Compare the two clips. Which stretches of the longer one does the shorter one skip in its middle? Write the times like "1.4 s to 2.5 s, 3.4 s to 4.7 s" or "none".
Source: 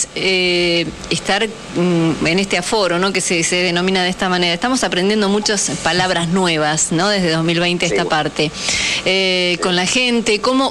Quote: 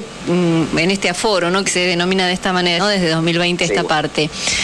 3.1 s to 3.4 s, 4.5 s to 7.0 s